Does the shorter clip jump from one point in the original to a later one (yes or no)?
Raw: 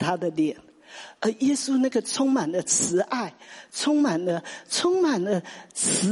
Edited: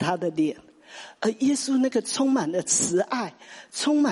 no